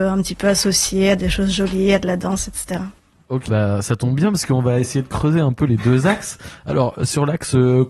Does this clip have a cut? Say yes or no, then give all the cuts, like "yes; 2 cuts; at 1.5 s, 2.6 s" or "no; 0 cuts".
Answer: yes; 1 cut; at 3.5 s